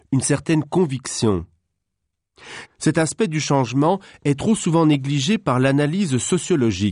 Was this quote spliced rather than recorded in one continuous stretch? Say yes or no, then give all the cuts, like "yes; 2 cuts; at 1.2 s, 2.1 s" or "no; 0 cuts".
yes; 1 cut; at 2.6 s